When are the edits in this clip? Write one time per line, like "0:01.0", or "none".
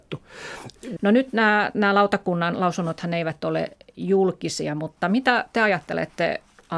0:01.0

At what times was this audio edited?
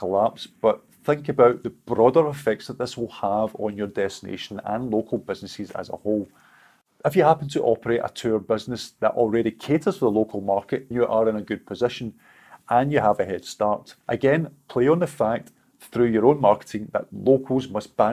0:10.9
0:14.0

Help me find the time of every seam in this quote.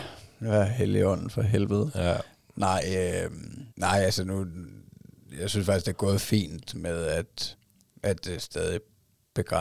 0:03.7

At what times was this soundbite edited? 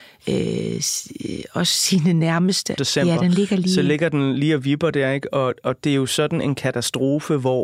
0:02.8

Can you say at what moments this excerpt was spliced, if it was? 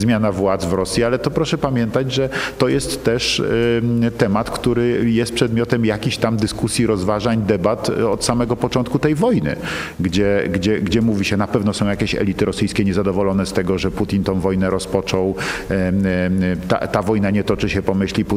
none

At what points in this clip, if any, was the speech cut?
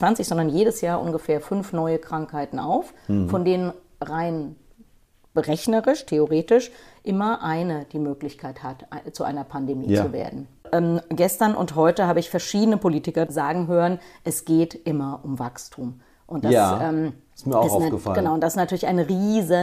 0:13.3

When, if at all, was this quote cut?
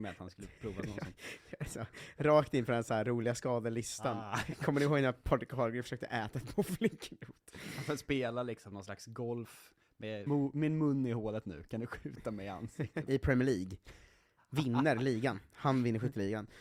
0:10.3
0:13.1

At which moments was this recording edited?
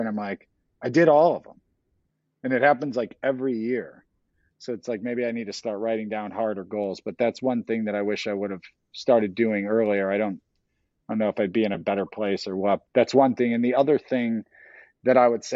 0:12.8

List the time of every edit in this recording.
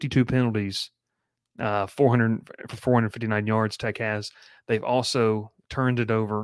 none

